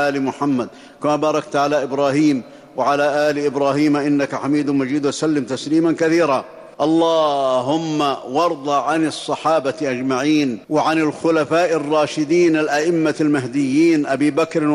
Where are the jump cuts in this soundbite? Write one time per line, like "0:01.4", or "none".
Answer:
0:06.7
0:10.6